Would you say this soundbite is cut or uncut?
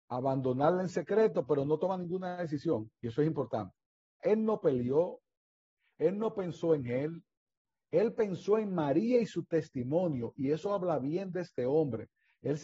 cut